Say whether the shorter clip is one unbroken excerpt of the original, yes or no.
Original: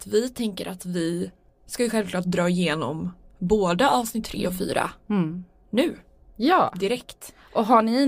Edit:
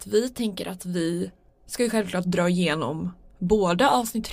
yes